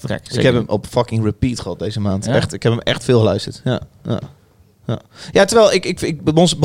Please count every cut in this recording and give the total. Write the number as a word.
zero